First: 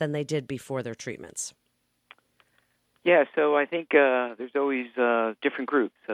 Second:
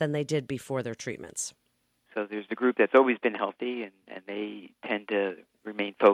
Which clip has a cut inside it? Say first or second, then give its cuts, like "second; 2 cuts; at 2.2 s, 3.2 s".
second; 1 cut; at 2.1 s